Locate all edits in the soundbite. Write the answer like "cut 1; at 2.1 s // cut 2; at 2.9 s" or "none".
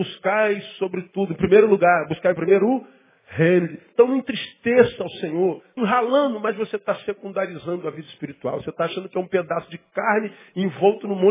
cut 1; at 5.8 s